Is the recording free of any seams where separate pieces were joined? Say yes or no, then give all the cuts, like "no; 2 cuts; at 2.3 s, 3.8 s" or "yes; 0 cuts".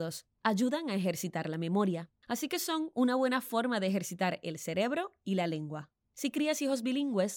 no; 2 cuts; at 2.2 s, 6.0 s